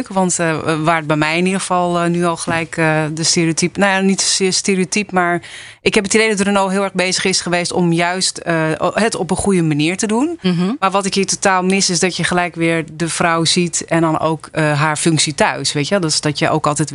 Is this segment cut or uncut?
uncut